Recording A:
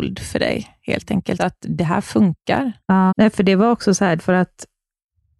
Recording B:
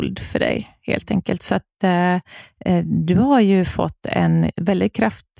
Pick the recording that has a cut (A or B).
A